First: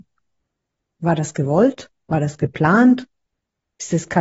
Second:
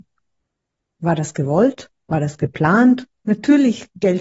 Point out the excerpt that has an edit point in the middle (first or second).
second